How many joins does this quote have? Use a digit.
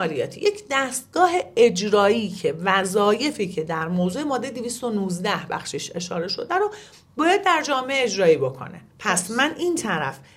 1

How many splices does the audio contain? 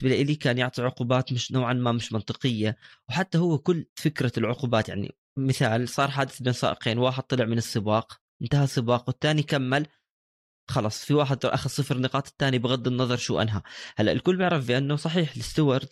2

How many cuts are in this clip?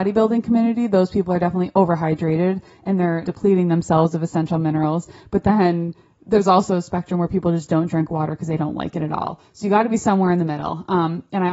1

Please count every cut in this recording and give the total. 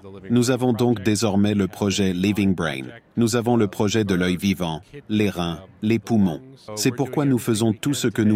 2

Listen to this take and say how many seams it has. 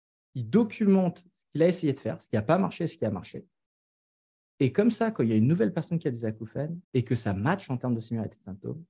1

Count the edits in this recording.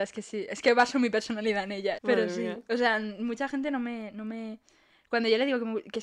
1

